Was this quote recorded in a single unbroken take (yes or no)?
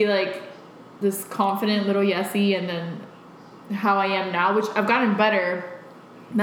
yes